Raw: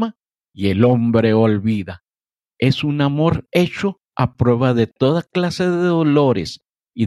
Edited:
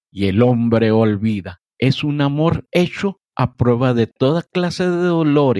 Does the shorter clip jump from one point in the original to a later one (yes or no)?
yes